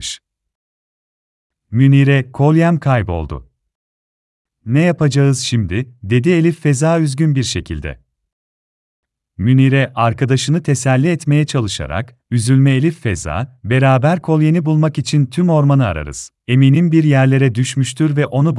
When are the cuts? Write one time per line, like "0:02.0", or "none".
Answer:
0:16.4